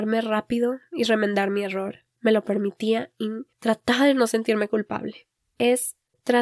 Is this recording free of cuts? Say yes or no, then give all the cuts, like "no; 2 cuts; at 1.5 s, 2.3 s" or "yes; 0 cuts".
no; 1 cut; at 2.1 s